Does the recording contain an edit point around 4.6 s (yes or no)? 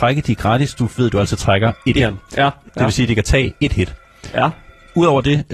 no